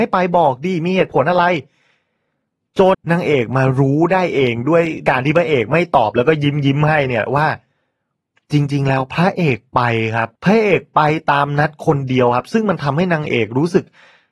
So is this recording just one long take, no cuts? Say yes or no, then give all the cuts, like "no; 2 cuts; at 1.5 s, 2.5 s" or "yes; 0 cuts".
no; 2 cuts; at 2.9 s, 10.4 s